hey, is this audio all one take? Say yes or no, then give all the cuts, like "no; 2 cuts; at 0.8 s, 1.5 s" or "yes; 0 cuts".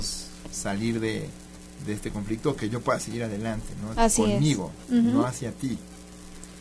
no; 1 cut; at 3.9 s